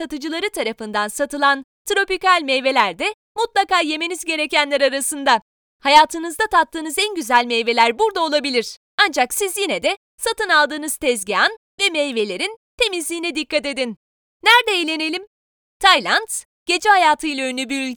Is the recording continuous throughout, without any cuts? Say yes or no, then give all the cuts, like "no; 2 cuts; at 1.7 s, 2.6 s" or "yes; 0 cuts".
yes; 0 cuts